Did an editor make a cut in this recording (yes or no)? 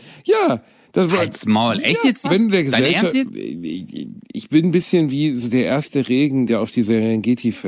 yes